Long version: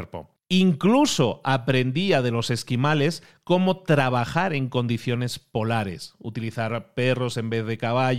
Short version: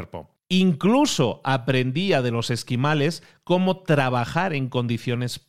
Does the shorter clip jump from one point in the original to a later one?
no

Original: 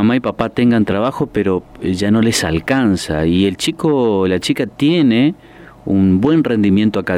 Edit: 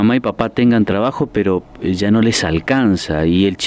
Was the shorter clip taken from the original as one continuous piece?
yes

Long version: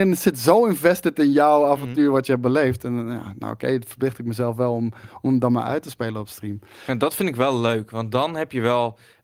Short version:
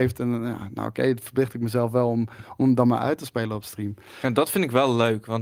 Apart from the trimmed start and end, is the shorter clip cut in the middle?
no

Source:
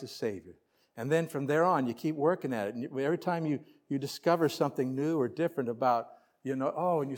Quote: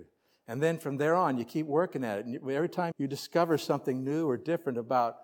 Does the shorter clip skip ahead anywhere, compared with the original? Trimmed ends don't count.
yes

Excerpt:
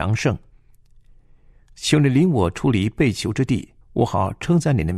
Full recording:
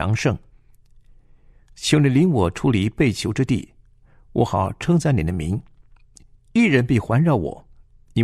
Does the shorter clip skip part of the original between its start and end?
yes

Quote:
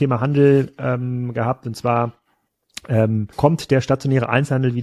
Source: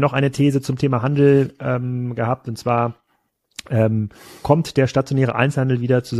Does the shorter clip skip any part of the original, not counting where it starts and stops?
yes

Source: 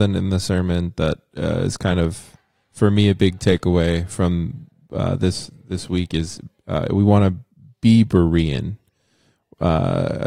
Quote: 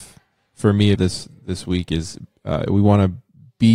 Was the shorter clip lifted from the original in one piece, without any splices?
no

